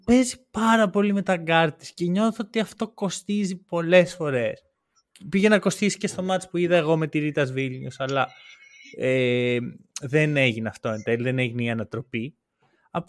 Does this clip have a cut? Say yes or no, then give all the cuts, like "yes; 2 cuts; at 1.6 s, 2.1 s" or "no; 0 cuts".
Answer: no; 0 cuts